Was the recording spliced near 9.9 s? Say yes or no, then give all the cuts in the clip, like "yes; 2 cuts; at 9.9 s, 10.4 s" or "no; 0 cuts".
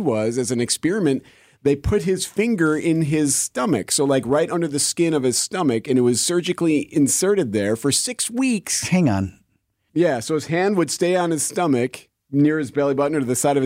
yes; 1 cut; at 9.9 s